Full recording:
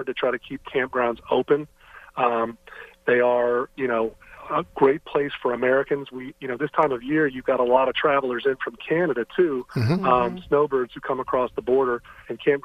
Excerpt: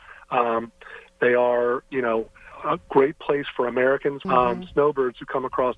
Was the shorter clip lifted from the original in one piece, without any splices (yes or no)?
no